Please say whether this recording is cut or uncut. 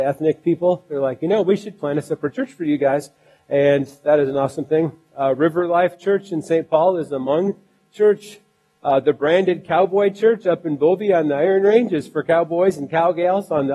uncut